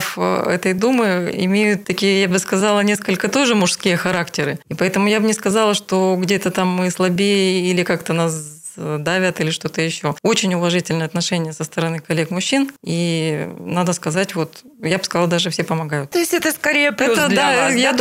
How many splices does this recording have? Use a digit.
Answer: 1